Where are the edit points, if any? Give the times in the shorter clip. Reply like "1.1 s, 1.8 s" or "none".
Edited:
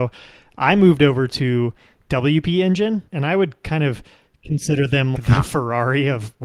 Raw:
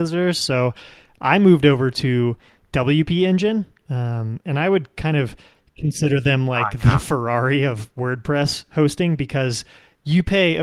3.1 s, 5.2 s